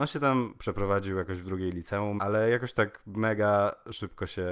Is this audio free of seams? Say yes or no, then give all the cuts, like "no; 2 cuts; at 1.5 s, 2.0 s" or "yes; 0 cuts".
no; 1 cut; at 2.2 s